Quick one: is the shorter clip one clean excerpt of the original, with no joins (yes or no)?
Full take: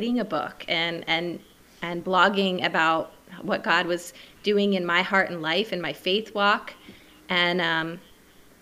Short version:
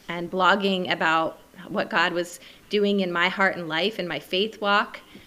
yes